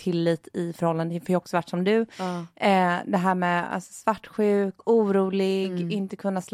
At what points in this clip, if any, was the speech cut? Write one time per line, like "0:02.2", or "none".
none